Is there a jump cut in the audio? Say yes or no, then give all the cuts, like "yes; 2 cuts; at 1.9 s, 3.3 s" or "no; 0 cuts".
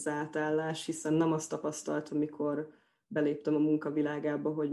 yes; 1 cut; at 2.1 s